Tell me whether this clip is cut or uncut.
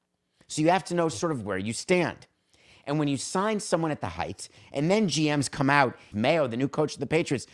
cut